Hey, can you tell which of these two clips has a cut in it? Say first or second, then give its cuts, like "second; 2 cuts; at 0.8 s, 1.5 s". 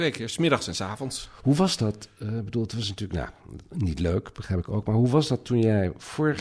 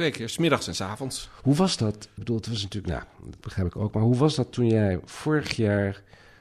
second; 2 cuts; at 2.2 s, 3.4 s